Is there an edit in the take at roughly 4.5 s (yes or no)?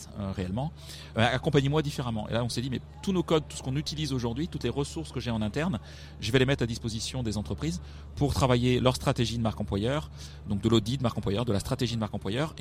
no